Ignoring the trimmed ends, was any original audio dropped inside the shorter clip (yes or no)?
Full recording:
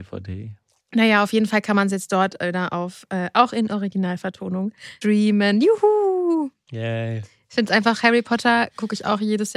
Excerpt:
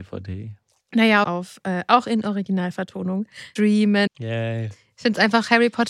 yes